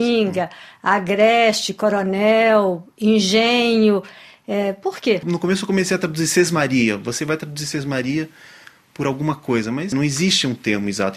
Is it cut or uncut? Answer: uncut